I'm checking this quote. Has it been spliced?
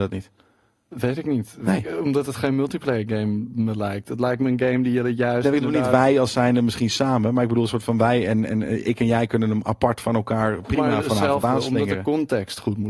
no; 0 cuts

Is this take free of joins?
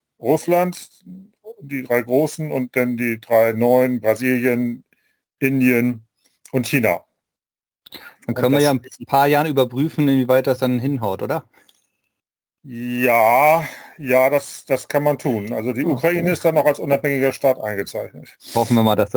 yes; 0 cuts

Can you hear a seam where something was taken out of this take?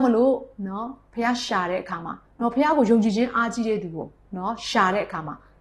yes; 1 cut; at 2.3 s

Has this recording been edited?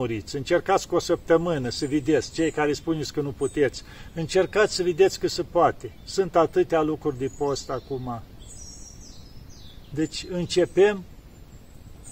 no; 0 cuts

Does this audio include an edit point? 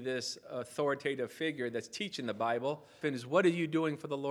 yes; 1 cut; at 3.0 s

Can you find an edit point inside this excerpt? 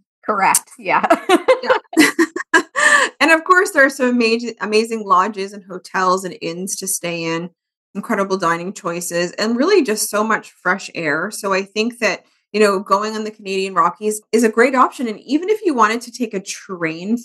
no; 0 cuts

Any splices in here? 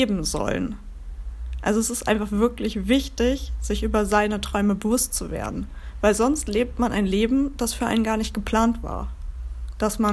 no; 0 cuts

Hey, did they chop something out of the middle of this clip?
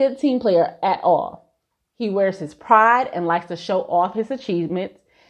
no; 0 cuts

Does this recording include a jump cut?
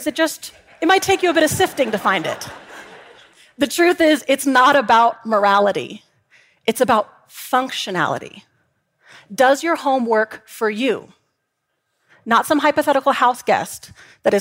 no; 0 cuts

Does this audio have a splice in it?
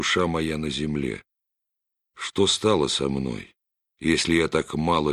yes; 1 cut; at 3.8 s

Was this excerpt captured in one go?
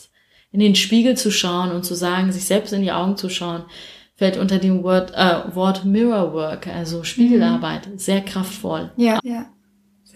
no; 1 cut; at 9.2 s

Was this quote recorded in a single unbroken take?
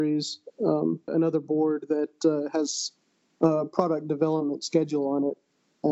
no; 1 cut; at 1.1 s

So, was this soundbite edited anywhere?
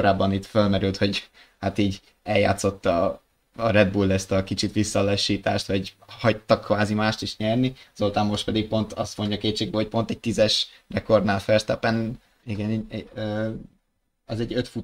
yes; 1 cut; at 12.4 s

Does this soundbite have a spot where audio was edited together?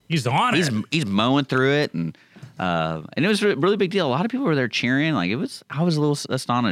no; 0 cuts

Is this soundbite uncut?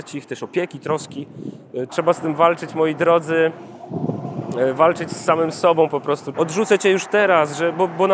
no; 2 cuts; at 1.9 s, 6.3 s

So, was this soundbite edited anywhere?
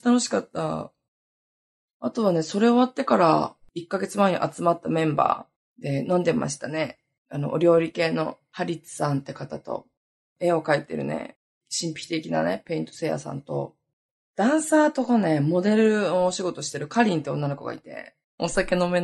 no; 0 cuts

